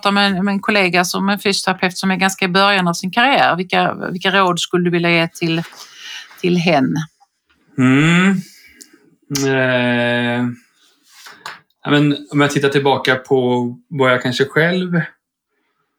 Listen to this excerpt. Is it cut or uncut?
uncut